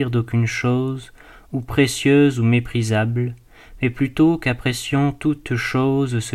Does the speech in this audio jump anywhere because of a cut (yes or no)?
no